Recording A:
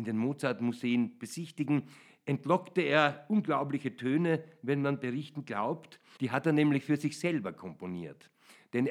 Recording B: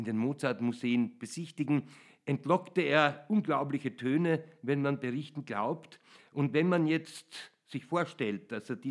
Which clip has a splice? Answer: A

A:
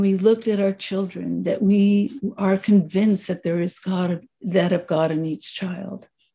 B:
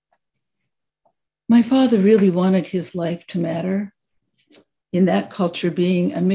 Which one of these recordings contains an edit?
B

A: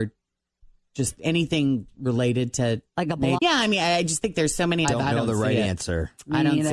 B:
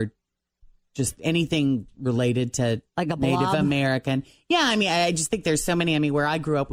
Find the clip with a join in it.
A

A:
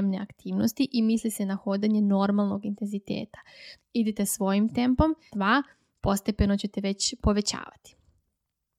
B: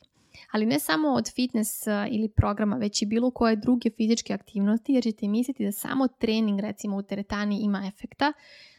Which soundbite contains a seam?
A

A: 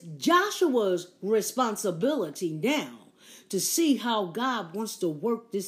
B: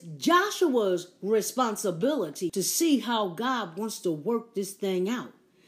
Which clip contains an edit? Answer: B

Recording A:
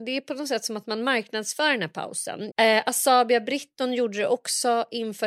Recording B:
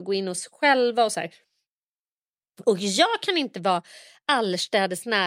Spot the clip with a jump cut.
A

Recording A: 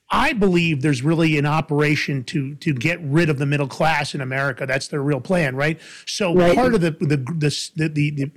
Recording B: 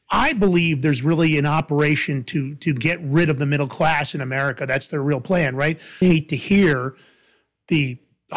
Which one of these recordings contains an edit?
B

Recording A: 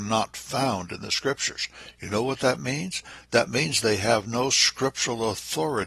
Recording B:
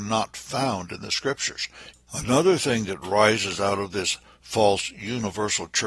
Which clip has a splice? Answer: B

